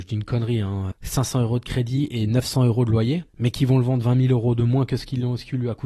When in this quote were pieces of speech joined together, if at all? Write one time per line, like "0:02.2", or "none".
0:00.9
0:03.3